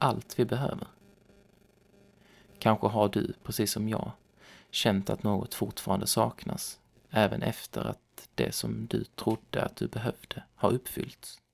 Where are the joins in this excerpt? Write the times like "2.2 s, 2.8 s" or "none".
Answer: none

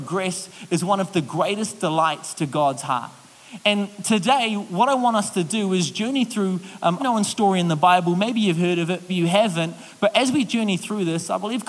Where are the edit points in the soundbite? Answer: 7.0 s, 9.1 s

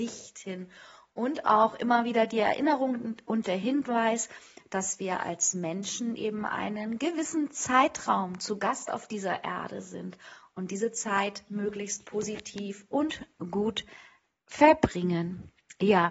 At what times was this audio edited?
none

